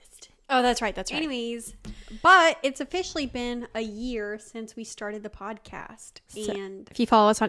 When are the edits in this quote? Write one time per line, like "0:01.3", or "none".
none